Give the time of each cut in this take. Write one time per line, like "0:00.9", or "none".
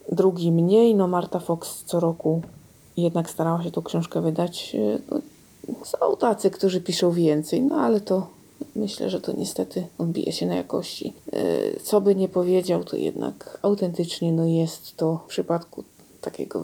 none